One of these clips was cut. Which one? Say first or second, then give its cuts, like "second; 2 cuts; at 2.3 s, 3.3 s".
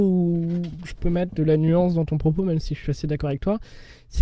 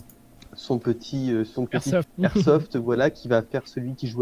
second; 1 cut; at 2.0 s